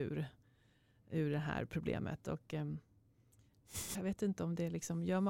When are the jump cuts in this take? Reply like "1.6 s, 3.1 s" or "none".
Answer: 3.9 s